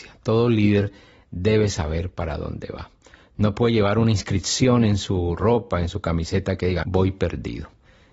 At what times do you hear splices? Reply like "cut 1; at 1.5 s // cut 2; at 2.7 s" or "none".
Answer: cut 1; at 6.8 s